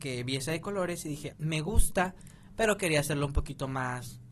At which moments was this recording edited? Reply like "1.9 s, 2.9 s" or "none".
1.3 s